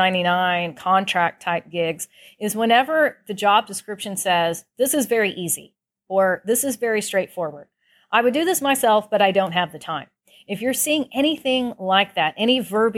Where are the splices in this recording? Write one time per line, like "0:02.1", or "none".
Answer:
none